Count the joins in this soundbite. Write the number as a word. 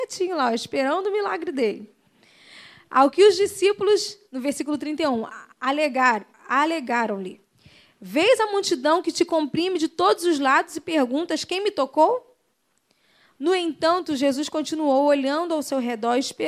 zero